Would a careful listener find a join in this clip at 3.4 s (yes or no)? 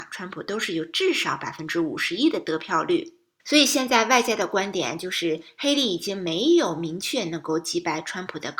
yes